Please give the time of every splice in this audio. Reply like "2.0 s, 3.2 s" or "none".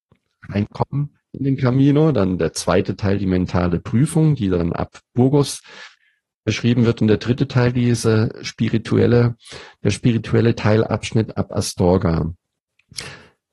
none